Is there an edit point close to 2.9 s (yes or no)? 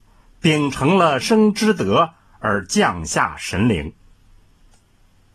no